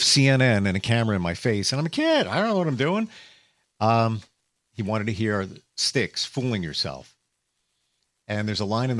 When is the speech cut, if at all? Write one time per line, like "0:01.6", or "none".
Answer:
0:04.6